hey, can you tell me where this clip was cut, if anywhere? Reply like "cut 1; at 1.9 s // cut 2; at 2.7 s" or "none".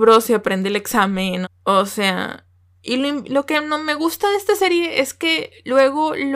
cut 1; at 1.4 s